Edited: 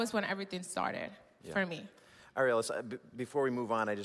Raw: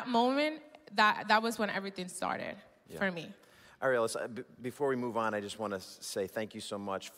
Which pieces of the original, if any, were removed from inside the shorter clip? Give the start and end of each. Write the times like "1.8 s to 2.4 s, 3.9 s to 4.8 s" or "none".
none